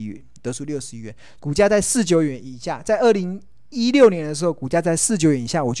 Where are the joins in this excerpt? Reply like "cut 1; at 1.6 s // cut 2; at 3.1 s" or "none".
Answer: cut 1; at 1.4 s